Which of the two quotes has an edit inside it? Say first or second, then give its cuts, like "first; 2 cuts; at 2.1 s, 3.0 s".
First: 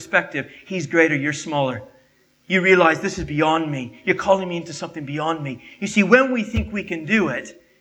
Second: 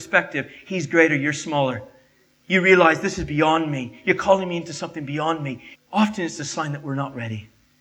second; 1 cut; at 5.7 s